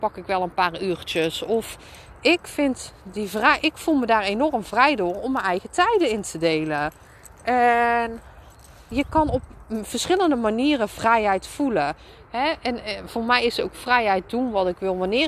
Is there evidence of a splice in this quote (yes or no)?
yes